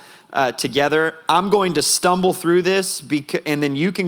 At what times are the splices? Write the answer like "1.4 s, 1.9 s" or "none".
none

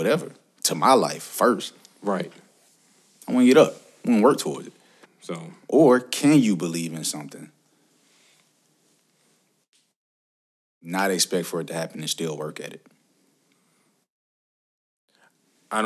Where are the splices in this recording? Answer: 5.0 s

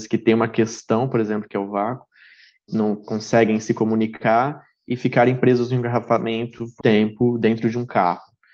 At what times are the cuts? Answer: 2.7 s, 6.8 s

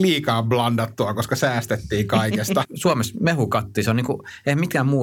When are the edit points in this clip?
2.6 s

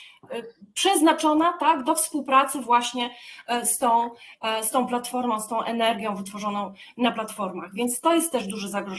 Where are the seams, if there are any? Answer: none

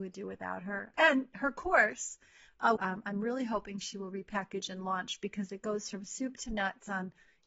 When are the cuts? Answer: 0.9 s, 2.8 s

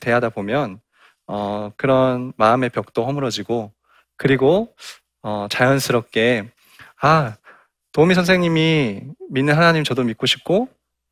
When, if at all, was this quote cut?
none

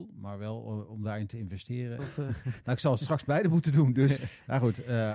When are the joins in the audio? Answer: 2.0 s, 4.2 s

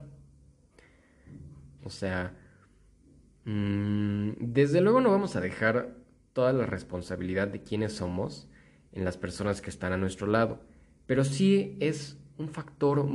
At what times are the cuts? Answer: 1.8 s

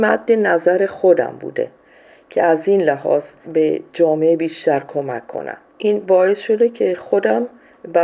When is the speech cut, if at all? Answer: 3.4 s, 5.7 s

